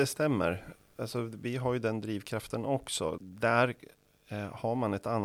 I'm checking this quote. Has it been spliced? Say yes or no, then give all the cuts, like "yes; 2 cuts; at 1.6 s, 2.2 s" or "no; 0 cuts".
yes; 1 cut; at 3.2 s